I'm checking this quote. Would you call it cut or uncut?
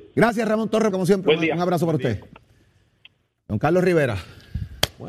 cut